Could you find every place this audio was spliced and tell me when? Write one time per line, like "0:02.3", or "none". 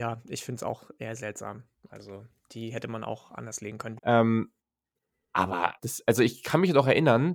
0:04.0
0:05.8